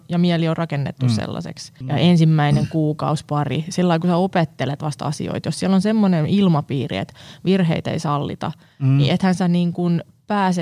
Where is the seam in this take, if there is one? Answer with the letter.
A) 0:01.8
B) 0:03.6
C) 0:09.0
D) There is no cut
A